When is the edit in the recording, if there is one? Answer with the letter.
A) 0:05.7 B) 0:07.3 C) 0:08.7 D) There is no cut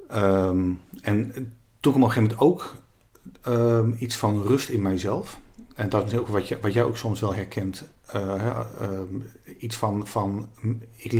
D